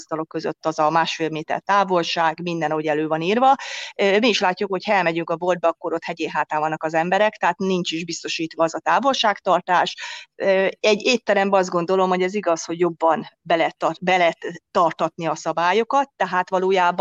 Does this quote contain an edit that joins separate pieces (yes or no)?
no